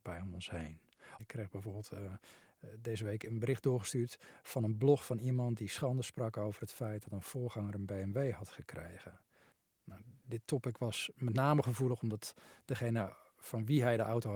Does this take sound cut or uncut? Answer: cut